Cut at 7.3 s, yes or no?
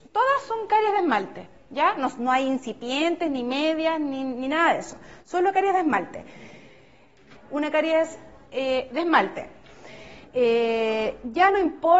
yes